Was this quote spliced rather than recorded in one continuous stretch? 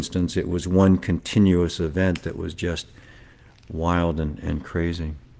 no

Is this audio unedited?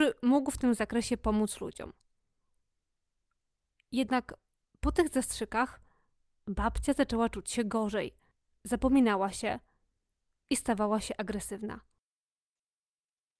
yes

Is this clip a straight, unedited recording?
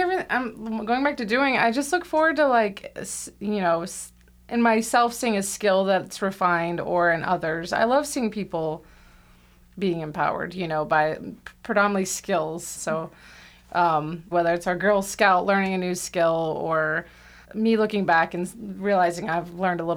no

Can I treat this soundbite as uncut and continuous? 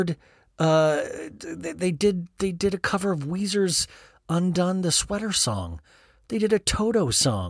yes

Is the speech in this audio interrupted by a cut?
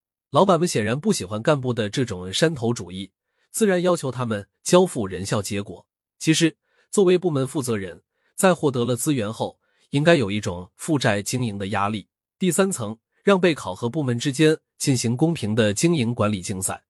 yes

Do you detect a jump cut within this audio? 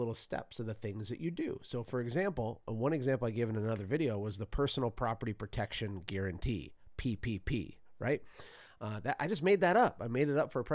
no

